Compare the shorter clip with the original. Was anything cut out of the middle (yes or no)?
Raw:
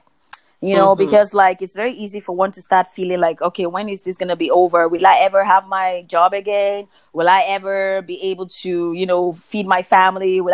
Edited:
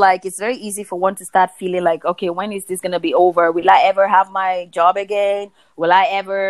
no